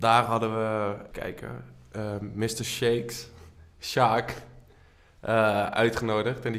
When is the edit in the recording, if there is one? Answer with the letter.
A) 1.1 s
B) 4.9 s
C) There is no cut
A